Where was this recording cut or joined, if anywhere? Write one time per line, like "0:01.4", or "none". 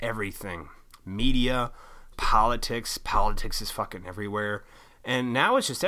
0:02.1
0:04.9